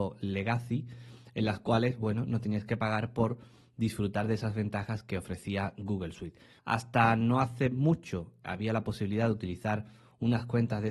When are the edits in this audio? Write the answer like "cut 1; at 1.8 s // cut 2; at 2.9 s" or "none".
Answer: cut 1; at 6.6 s